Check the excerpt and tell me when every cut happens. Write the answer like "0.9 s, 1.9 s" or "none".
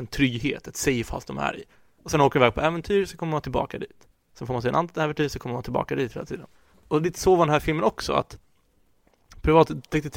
6.7 s